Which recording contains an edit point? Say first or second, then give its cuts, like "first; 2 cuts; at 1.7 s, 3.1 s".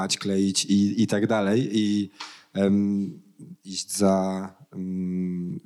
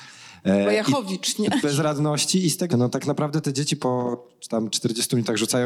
second; 2 cuts; at 1.6 s, 2.7 s